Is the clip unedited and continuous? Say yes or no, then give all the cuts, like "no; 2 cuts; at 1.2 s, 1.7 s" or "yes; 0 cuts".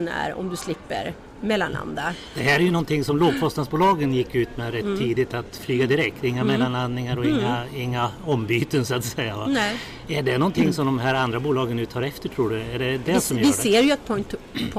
yes; 0 cuts